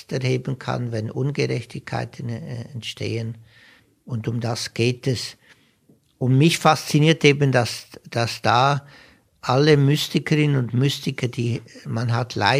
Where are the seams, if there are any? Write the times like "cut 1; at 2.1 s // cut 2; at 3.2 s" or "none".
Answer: none

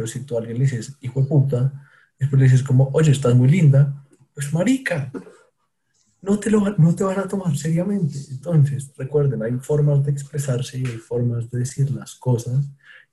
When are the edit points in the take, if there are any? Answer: none

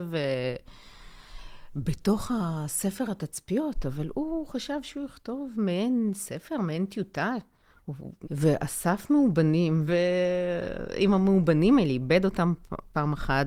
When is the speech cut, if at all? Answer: cut 1; at 8.2 s // cut 2; at 9.9 s

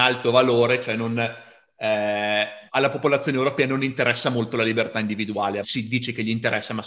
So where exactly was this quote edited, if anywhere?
cut 1; at 2.7 s // cut 2; at 5.6 s

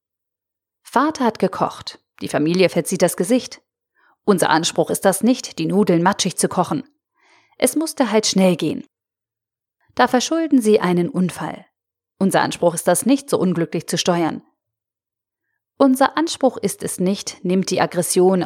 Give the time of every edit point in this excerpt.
none

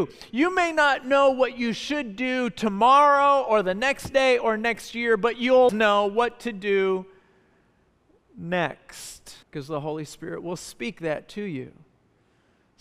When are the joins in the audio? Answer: cut 1; at 5.7 s // cut 2; at 9.4 s

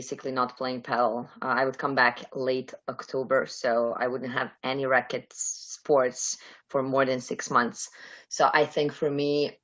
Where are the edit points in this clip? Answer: none

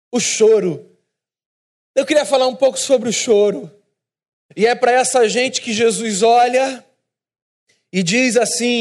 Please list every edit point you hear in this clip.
cut 1; at 4.4 s

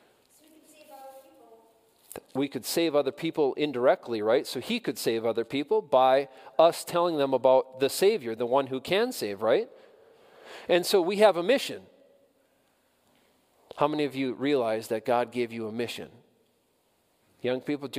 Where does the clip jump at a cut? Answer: none

